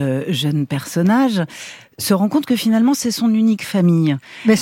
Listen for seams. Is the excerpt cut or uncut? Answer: uncut